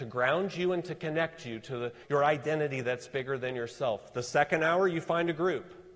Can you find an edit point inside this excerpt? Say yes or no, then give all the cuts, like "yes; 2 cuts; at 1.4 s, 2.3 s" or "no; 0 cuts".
yes; 1 cut; at 2.0 s